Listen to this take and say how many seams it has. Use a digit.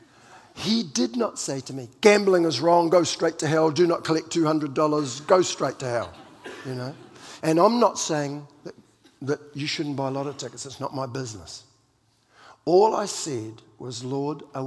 1